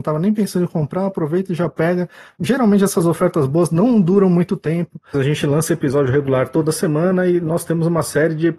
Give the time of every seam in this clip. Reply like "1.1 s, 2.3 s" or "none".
2.4 s, 5.1 s

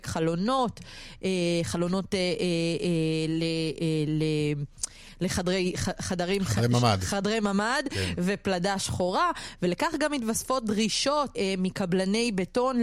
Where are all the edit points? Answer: 11.3 s

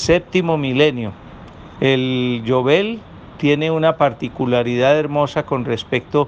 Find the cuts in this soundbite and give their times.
1.8 s

